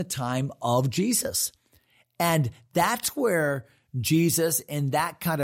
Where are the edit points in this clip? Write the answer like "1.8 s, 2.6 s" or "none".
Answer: none